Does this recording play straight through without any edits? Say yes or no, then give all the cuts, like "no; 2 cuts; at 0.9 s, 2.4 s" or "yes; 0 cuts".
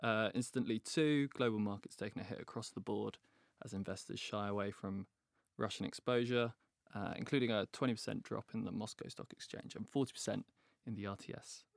yes; 0 cuts